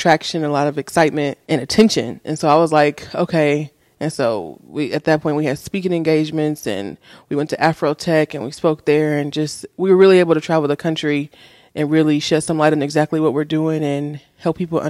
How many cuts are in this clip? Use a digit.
2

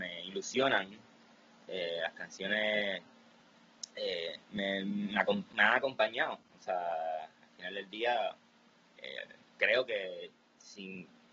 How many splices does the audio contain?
1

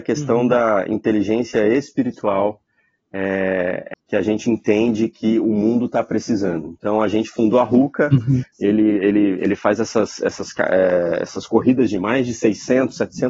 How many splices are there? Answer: 2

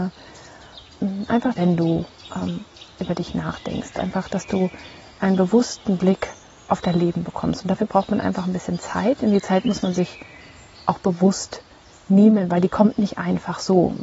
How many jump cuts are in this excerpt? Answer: 1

